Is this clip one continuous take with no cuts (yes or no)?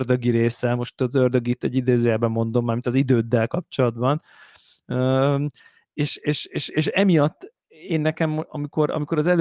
yes